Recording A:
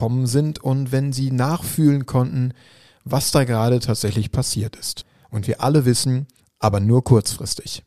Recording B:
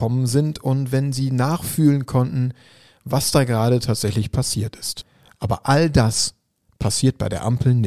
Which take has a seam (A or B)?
A